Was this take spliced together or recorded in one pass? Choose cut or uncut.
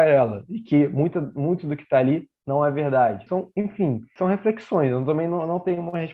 cut